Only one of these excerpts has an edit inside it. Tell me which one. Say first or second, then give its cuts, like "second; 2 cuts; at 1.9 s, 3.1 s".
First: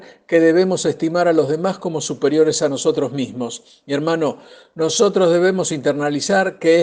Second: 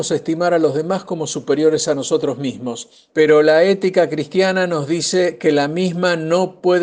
second; 1 cut; at 3.1 s